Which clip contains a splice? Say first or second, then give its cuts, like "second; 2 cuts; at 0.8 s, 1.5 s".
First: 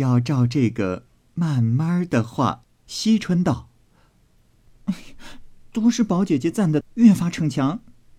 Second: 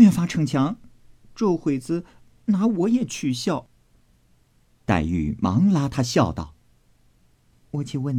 first; 2 cuts; at 2.6 s, 6.8 s